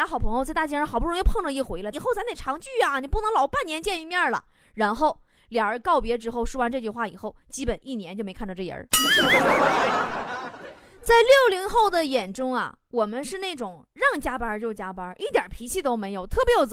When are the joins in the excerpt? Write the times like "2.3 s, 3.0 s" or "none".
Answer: 1.9 s